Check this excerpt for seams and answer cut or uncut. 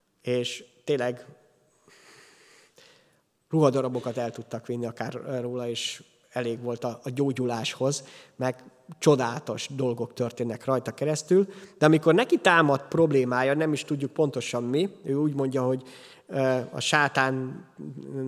uncut